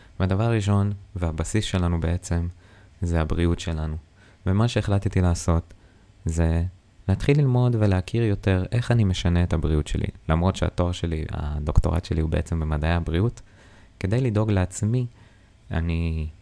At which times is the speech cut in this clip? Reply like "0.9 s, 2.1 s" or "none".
none